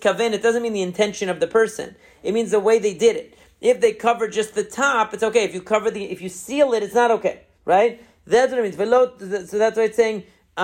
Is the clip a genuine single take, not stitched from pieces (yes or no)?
no